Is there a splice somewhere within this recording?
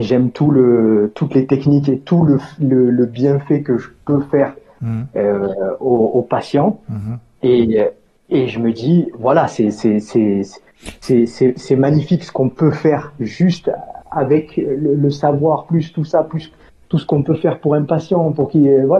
yes; 2 cuts; at 9.1 s, 15.7 s

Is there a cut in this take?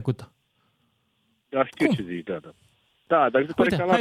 no; 0 cuts

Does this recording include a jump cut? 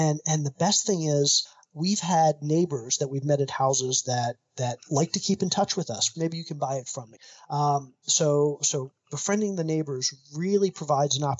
yes; 1 cut; at 6.1 s

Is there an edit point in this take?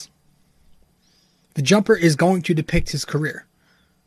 no; 0 cuts

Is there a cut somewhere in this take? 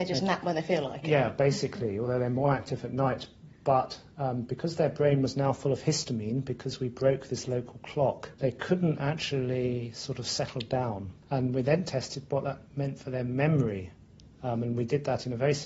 no; 0 cuts

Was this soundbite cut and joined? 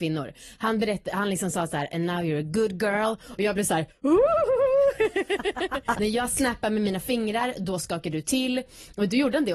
yes; 1 cut; at 5.9 s

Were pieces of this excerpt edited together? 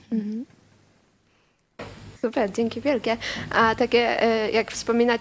yes; 1 cut; at 2.2 s

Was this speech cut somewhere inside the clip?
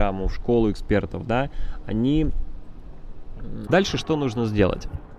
yes; 1 cut; at 3.7 s

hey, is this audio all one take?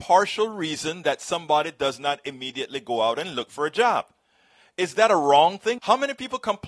no; 1 cut; at 5.8 s

